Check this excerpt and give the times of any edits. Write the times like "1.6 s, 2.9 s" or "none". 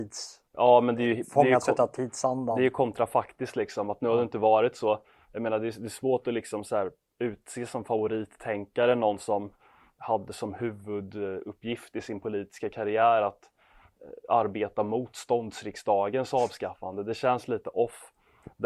none